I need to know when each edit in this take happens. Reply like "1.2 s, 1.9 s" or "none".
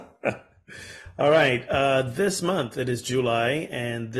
none